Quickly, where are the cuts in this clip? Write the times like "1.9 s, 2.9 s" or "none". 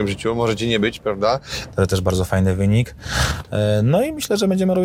1.7 s